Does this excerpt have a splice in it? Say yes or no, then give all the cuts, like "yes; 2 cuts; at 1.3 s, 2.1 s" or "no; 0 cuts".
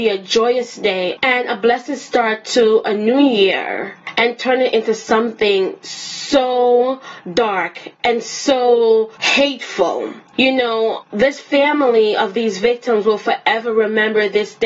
yes; 2 cuts; at 1.2 s, 11.0 s